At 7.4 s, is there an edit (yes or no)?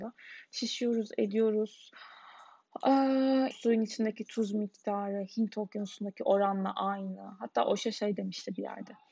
no